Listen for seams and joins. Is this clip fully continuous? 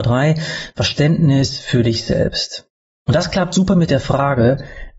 no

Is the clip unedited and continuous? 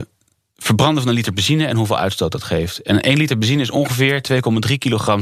yes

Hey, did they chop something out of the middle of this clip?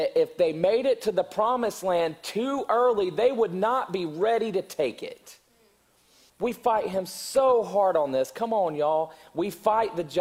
yes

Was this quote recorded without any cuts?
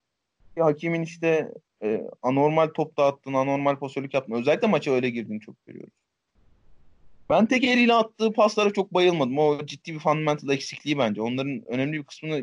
no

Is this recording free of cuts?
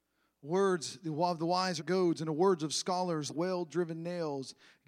no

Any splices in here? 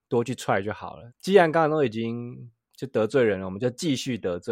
no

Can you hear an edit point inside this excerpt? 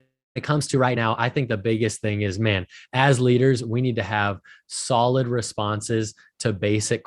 no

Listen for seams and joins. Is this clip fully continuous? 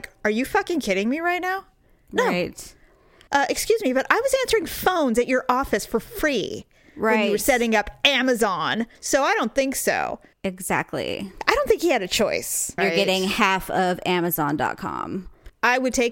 no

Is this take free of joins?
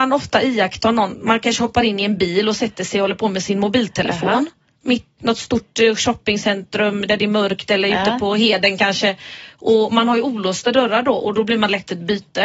no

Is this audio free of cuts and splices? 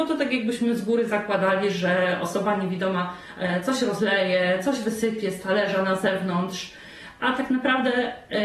yes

